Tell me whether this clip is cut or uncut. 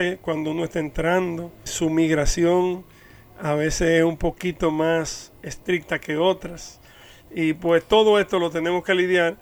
cut